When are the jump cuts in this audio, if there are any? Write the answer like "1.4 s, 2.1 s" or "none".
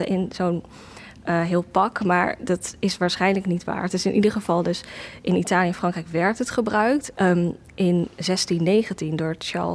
7.1 s